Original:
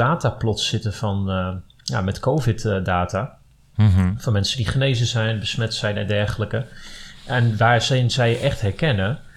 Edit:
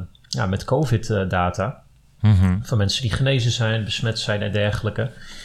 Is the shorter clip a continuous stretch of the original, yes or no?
yes